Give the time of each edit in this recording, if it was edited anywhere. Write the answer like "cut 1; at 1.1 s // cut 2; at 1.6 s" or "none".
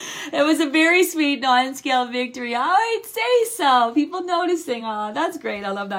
none